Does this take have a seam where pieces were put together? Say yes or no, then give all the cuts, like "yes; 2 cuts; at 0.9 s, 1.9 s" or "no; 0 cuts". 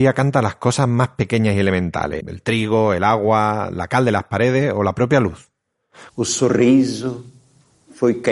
yes; 2 cuts; at 2.2 s, 6.1 s